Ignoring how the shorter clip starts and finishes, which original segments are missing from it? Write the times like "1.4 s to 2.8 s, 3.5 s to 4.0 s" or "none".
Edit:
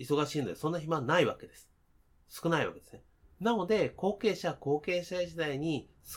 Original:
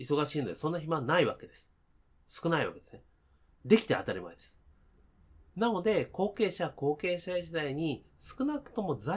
3.2 s to 5.4 s